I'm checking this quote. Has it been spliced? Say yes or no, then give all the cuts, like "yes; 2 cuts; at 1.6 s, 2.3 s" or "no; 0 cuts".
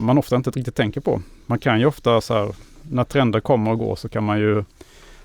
no; 0 cuts